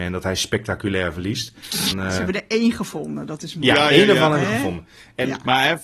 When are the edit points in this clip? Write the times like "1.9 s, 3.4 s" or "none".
1.9 s